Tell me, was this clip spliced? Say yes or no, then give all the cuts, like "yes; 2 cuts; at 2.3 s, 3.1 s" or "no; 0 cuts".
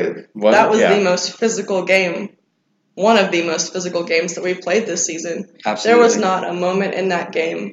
no; 0 cuts